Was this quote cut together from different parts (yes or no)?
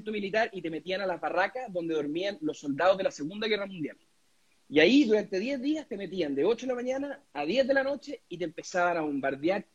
no